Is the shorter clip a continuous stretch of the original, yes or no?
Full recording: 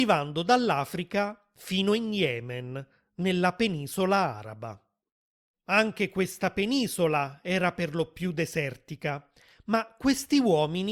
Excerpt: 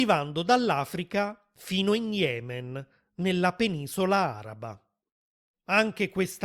yes